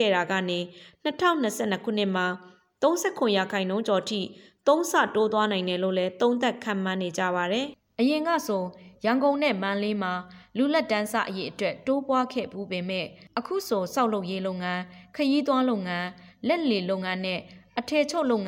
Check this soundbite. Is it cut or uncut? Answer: uncut